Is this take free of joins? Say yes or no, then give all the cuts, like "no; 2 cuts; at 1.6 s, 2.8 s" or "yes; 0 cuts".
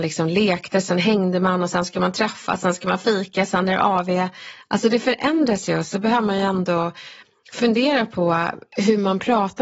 yes; 0 cuts